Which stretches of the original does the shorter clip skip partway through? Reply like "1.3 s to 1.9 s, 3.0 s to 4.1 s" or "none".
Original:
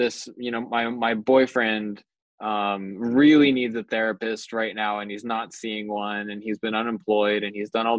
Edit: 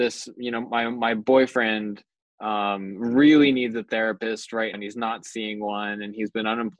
4.7 s to 5.0 s